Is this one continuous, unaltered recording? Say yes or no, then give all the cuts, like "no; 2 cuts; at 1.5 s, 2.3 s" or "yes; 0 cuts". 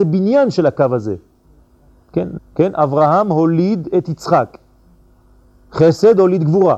no; 1 cut; at 2.4 s